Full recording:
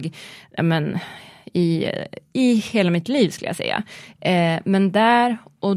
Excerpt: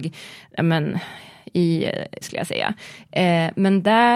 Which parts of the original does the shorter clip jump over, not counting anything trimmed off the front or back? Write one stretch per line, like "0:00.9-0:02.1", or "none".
0:02.2-0:03.3